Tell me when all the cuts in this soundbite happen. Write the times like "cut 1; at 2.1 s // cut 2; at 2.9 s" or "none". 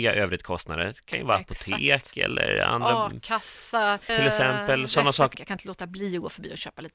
cut 1; at 4.1 s // cut 2; at 5.3 s